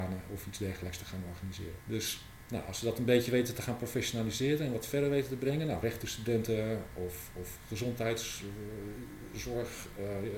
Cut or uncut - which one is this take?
cut